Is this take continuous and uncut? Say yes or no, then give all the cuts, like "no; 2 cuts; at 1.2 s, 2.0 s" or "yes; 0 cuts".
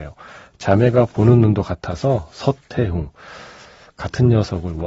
yes; 0 cuts